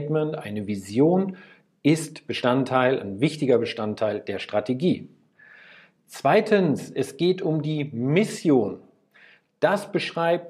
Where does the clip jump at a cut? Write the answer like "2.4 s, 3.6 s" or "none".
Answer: none